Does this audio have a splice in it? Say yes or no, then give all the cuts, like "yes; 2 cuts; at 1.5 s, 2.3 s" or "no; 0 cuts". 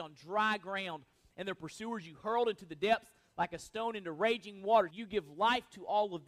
yes; 1 cut; at 4.9 s